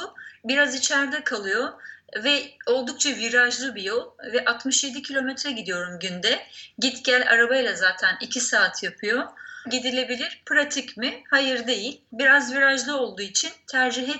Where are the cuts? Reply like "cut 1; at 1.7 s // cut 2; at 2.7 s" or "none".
cut 1; at 9.6 s // cut 2; at 12.1 s